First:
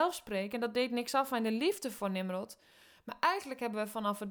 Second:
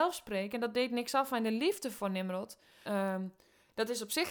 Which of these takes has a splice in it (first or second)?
second